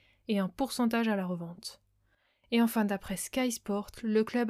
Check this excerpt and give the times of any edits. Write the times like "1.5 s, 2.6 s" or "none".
none